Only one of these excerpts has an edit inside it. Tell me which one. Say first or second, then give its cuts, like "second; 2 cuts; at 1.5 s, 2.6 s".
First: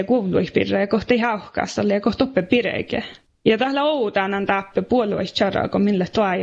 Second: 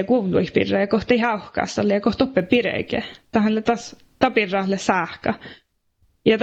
first; 1 cut; at 3.3 s